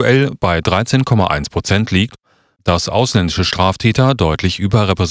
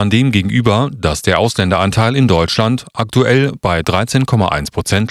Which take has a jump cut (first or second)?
first